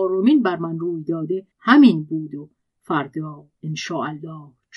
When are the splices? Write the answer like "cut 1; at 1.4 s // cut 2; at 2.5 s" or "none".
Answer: cut 1; at 1.5 s